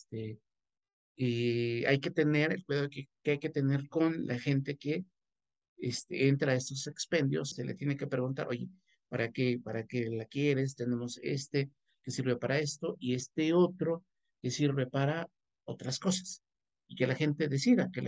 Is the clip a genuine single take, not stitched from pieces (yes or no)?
no